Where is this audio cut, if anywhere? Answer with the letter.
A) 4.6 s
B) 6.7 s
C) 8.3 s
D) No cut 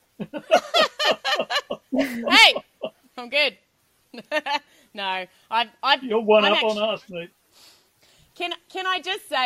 D